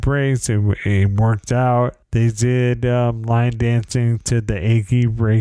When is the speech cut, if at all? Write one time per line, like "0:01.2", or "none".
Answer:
none

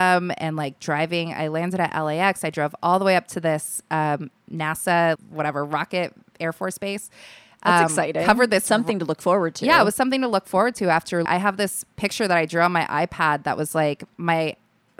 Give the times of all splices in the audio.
0:05.2
0:11.3

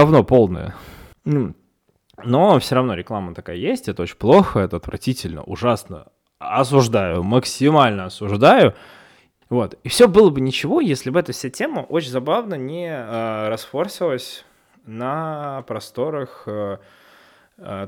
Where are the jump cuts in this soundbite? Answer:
0:01.1
0:09.4

